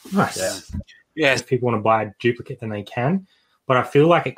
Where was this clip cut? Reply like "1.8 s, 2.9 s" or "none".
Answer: 1.4 s